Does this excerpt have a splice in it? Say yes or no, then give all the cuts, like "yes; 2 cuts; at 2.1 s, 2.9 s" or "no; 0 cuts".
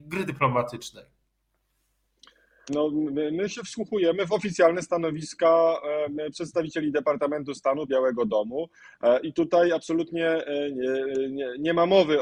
yes; 2 cuts; at 2.7 s, 7.9 s